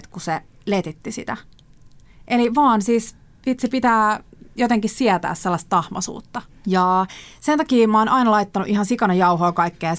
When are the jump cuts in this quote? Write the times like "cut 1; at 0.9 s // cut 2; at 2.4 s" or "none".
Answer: cut 1; at 6.6 s